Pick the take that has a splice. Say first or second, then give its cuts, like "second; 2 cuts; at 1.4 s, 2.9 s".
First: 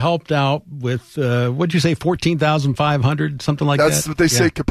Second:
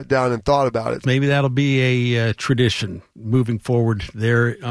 second; 1 cut; at 1.0 s